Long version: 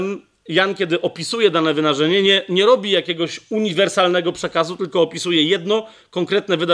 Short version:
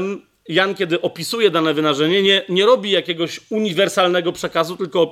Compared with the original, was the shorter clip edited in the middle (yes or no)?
no